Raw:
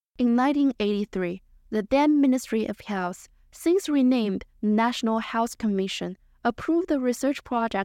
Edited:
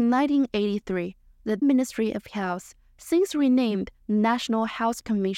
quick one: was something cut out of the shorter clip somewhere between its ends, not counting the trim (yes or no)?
yes